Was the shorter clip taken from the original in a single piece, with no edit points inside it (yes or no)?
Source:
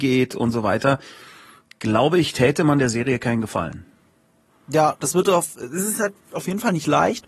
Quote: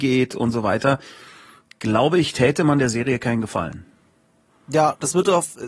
yes